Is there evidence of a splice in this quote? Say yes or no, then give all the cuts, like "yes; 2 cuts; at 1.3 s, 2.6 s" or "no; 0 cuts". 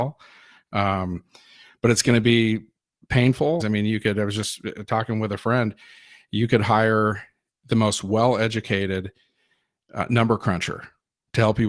yes; 1 cut; at 3.6 s